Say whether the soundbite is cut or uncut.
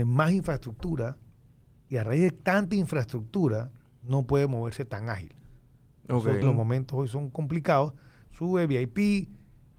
cut